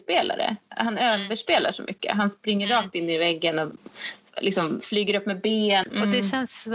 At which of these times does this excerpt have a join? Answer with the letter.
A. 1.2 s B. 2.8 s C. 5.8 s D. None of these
C